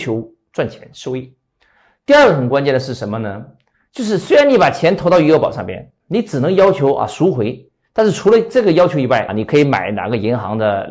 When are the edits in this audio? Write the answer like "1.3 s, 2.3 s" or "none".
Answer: 6.0 s, 9.3 s